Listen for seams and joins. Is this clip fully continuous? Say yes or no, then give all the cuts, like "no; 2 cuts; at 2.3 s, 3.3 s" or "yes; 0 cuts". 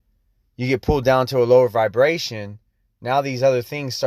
yes; 0 cuts